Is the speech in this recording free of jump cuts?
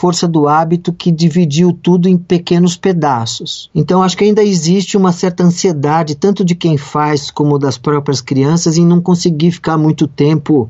yes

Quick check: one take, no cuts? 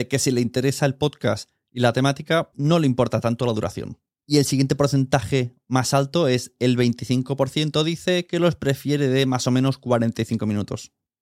no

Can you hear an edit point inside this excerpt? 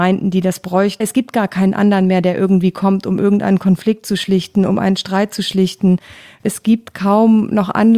yes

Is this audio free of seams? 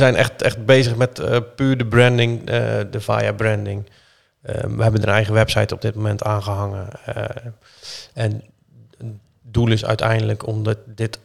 yes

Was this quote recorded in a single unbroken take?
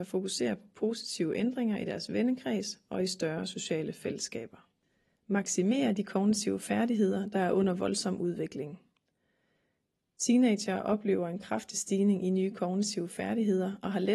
yes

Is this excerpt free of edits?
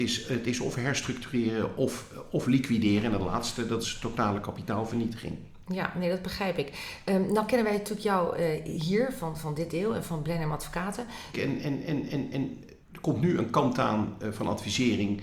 no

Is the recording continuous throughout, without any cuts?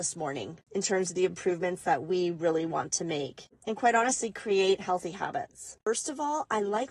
no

